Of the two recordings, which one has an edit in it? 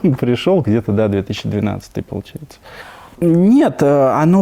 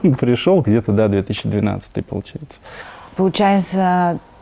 first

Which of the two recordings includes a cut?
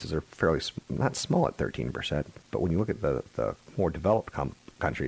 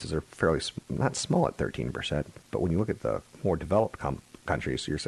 second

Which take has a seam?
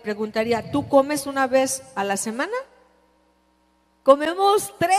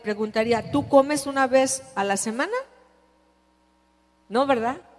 first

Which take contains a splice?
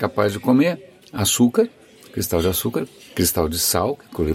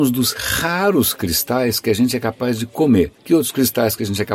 second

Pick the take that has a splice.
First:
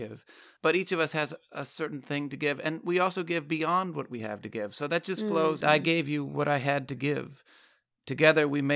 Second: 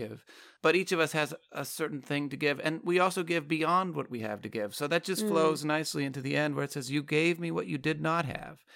first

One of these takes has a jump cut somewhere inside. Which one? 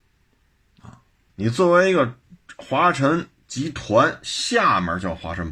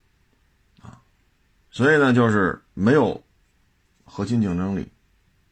first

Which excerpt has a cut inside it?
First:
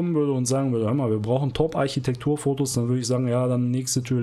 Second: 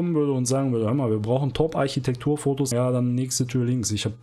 second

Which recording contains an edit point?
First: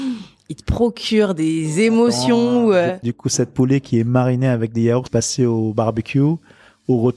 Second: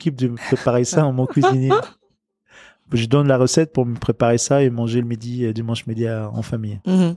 first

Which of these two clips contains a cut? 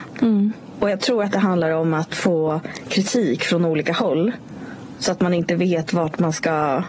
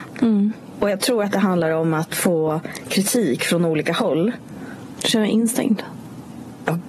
second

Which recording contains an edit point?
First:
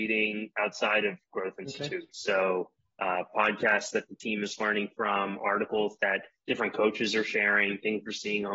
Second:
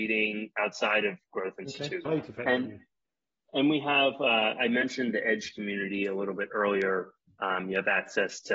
second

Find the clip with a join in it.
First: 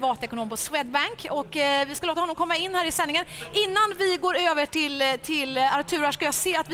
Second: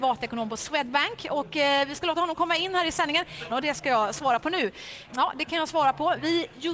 second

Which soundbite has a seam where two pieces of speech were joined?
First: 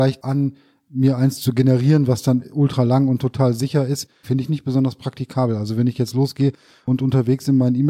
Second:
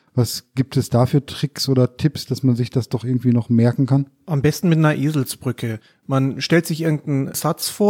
first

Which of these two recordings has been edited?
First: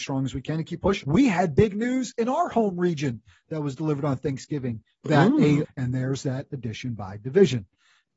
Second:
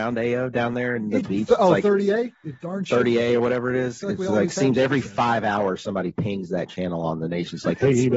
first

